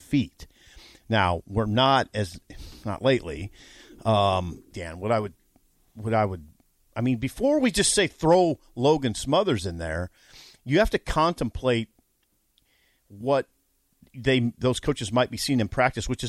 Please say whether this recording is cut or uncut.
cut